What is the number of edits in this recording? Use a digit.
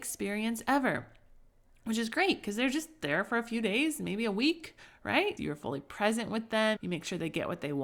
2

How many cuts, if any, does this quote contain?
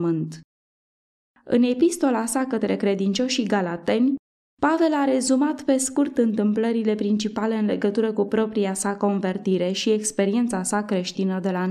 1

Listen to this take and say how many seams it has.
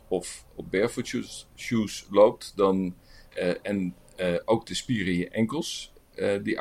1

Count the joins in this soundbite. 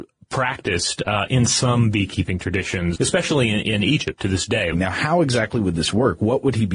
2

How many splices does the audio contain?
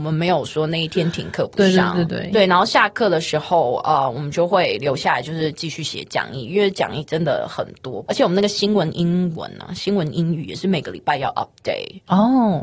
2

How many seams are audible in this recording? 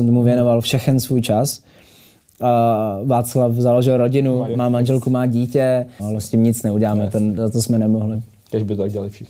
3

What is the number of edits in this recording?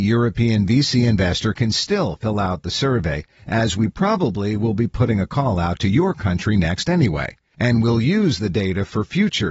0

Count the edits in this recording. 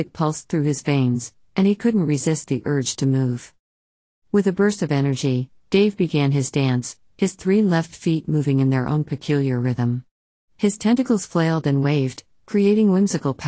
0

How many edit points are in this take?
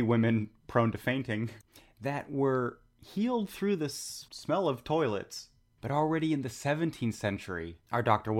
1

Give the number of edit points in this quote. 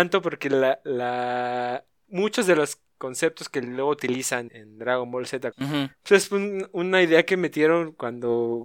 2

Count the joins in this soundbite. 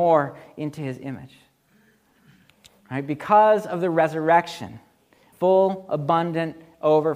1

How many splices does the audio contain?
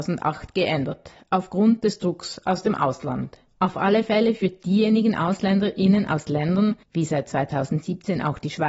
1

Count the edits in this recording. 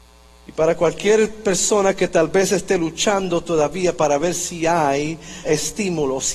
1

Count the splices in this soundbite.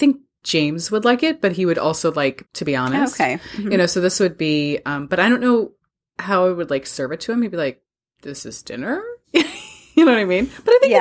1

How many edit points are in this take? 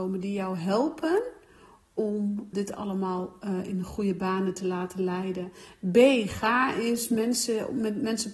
1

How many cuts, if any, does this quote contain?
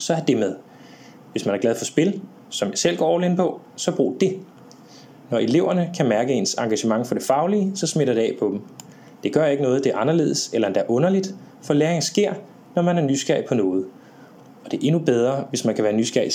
0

